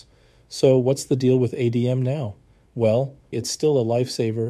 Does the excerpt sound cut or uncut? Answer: cut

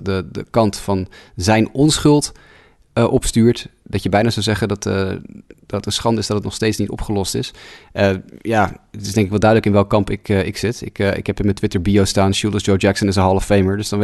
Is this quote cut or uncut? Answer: uncut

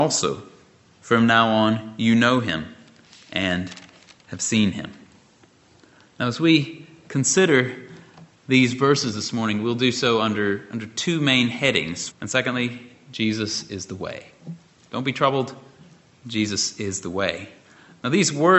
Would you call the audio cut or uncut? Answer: cut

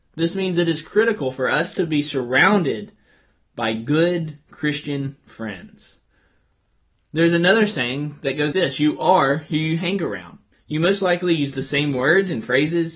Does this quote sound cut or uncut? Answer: cut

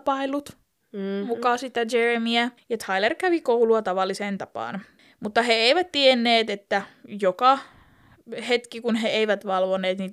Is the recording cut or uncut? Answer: cut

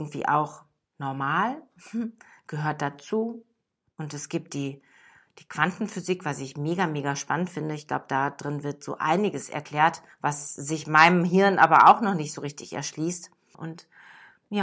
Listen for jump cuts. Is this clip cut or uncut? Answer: cut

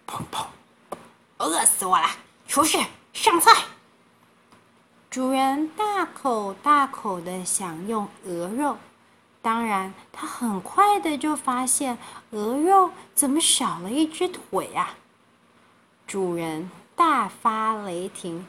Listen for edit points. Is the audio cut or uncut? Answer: uncut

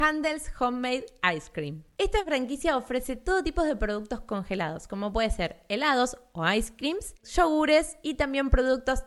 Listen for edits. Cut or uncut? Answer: uncut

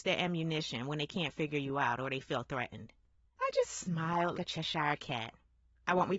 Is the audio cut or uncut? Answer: cut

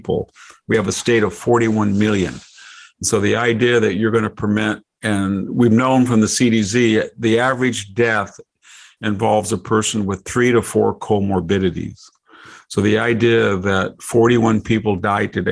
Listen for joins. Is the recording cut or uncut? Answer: uncut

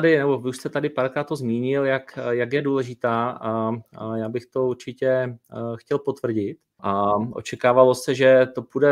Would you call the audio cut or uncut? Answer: cut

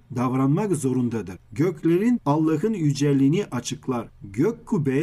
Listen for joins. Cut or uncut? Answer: cut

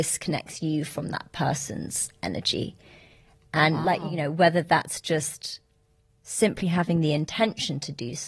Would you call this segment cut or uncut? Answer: uncut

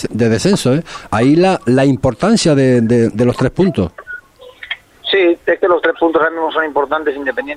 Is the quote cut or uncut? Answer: uncut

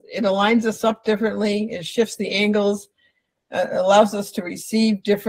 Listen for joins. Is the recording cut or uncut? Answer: uncut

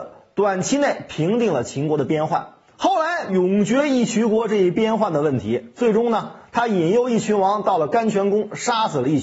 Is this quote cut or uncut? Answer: cut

